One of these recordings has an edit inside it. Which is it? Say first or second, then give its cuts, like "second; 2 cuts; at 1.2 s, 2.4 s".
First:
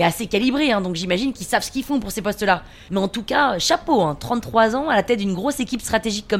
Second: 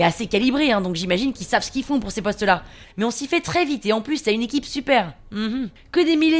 second; 1 cut; at 2.8 s